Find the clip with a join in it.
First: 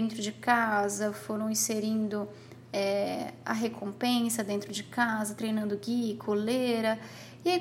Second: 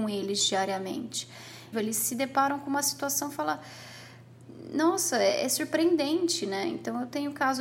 second; 1 cut; at 1.7 s

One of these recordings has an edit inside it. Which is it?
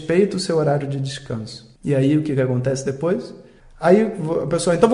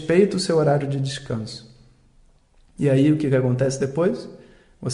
first; 2 cuts; at 1.8 s, 3.6 s

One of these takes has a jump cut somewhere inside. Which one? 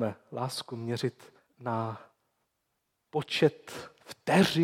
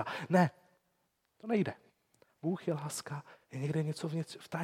first; 1 cut; at 1.5 s

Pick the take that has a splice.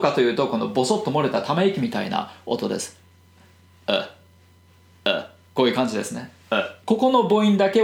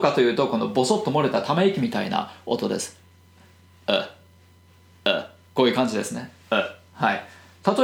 first; 1 cut; at 6.8 s

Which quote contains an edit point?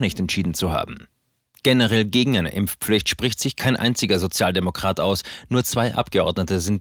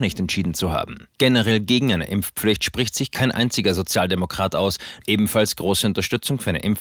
second; 2 cuts; at 1.1 s, 5.0 s

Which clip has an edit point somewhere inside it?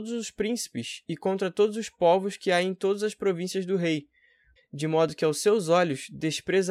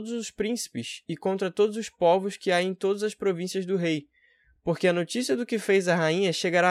first; 1 cut; at 4.6 s

